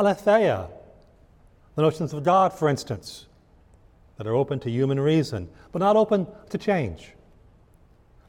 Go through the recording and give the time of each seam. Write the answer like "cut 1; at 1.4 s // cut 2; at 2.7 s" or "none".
cut 1; at 1.6 s